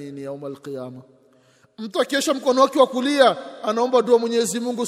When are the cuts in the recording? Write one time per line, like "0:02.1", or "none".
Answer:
none